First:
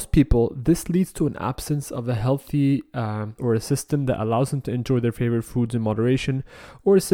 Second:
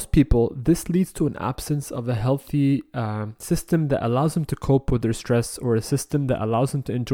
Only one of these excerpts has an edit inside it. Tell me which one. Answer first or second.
first